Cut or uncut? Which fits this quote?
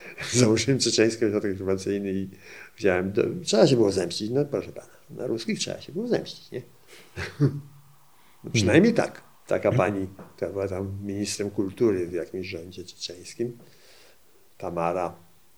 uncut